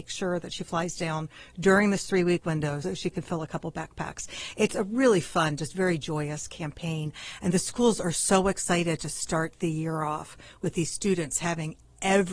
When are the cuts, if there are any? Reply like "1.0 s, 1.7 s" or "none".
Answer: 2.8 s